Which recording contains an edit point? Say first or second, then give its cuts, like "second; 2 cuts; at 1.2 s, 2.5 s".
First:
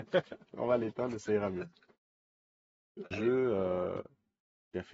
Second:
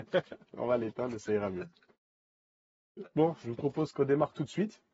first; 1 cut; at 3.1 s